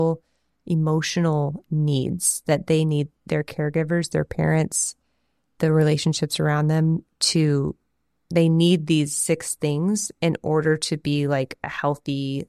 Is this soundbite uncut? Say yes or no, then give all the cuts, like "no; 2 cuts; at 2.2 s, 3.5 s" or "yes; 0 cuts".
yes; 0 cuts